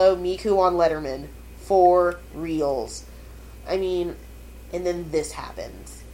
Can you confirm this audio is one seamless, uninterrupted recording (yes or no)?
no